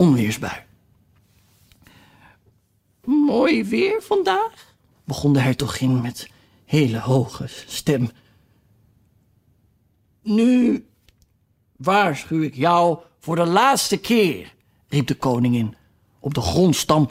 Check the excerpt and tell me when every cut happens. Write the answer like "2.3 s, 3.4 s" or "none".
4.9 s